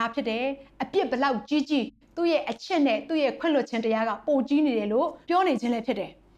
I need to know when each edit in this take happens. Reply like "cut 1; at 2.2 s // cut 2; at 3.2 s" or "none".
cut 1; at 5.2 s